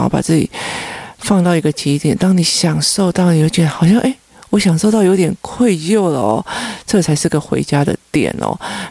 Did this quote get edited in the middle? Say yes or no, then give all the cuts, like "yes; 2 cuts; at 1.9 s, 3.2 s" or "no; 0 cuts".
no; 0 cuts